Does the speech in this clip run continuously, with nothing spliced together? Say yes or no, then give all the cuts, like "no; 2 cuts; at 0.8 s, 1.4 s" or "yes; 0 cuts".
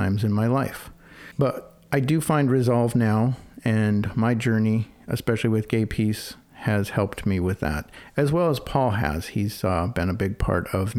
yes; 0 cuts